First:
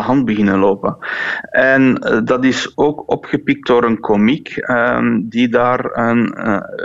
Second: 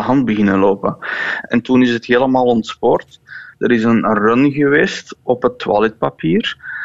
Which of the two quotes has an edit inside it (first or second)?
second